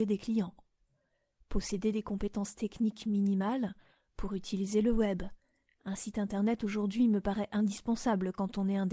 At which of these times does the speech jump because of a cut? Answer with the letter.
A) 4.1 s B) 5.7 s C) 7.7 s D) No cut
D